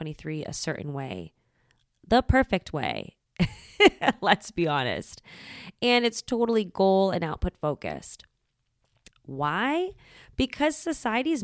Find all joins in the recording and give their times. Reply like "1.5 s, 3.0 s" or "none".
9.1 s